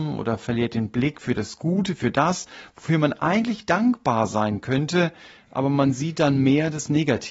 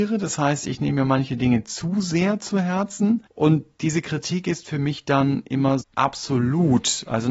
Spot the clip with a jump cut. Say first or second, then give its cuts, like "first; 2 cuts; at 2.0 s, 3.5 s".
second; 2 cuts; at 3.3 s, 5.8 s